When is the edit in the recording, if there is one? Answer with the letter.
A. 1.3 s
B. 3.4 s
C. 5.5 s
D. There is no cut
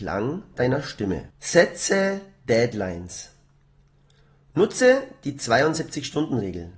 A